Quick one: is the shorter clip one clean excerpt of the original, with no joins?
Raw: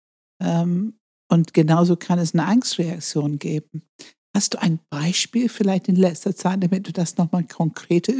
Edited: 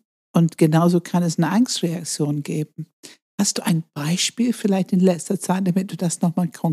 yes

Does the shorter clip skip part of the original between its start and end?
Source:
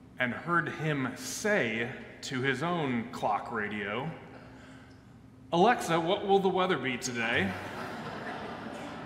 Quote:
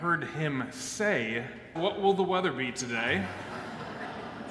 yes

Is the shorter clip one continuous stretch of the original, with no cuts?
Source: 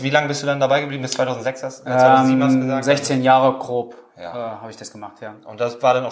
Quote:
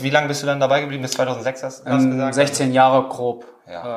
no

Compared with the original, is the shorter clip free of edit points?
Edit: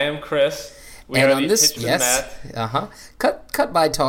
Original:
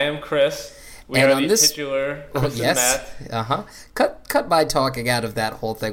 no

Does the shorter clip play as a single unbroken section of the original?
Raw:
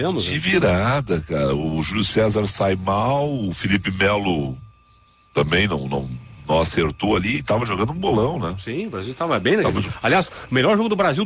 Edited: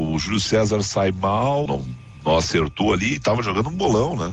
no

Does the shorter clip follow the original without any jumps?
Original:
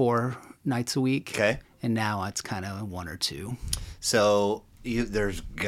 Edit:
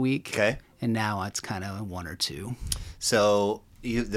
yes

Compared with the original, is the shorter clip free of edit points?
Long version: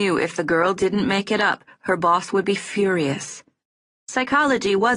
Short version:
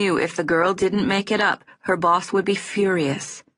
yes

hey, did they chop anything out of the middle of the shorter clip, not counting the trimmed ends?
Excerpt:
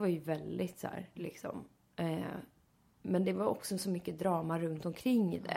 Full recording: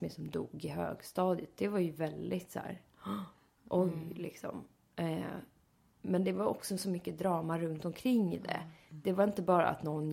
yes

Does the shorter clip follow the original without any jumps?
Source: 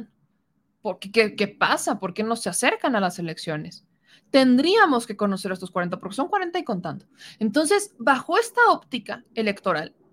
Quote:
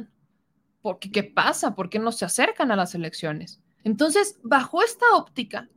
no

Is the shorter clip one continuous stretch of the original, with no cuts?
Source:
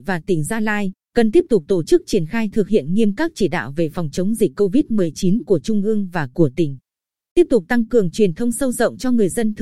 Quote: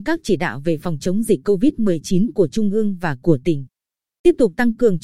yes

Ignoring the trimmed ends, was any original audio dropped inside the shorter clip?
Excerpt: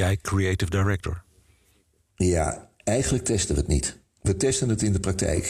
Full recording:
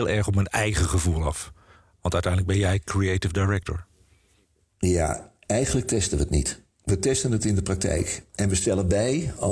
no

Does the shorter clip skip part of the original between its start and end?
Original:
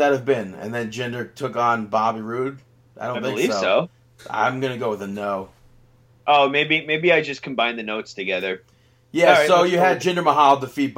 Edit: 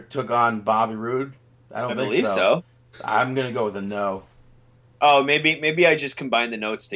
no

